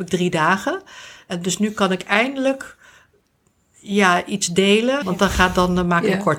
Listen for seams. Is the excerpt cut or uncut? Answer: cut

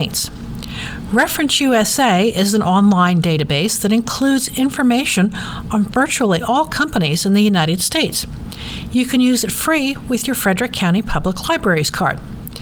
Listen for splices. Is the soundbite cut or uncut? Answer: uncut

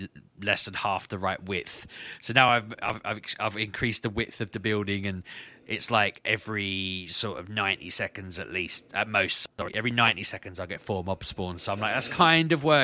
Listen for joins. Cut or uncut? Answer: uncut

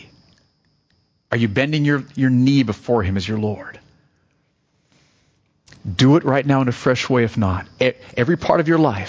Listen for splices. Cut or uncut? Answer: uncut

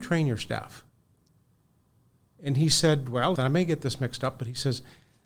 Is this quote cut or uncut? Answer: cut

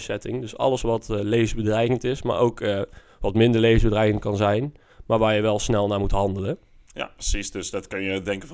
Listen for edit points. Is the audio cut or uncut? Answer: uncut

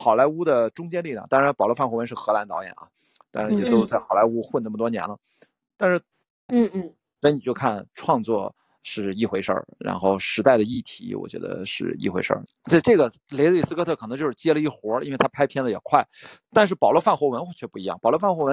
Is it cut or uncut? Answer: cut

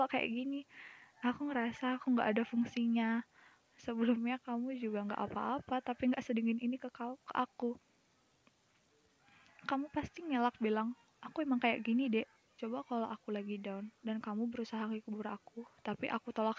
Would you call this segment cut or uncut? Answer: cut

